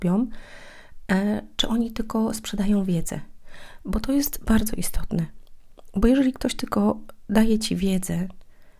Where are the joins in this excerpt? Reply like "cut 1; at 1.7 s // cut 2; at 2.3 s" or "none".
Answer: none